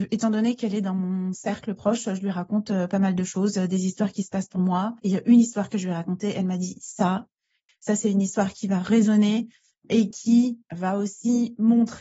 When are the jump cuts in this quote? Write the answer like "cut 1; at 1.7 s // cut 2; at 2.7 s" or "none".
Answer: cut 1; at 5.0 s // cut 2; at 7.7 s